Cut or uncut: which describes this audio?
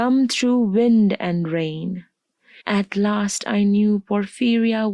cut